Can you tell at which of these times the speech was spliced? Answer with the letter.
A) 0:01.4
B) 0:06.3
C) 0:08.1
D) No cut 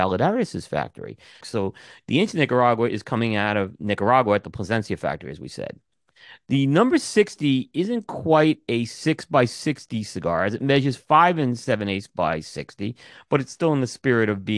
A